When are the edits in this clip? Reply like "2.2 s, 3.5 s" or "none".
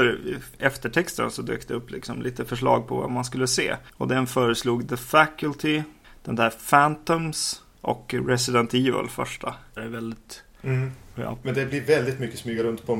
9.8 s, 11.4 s